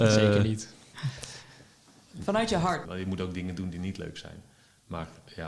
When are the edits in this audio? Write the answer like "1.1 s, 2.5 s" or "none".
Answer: 2.8 s